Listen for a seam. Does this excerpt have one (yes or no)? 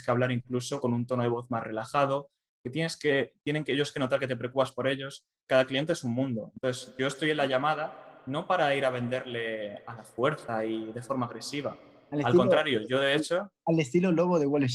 no